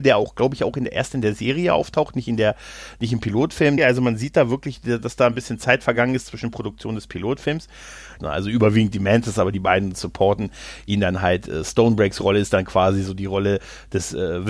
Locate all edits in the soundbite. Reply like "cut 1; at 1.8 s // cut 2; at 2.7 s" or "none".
cut 1; at 3.8 s // cut 2; at 8.2 s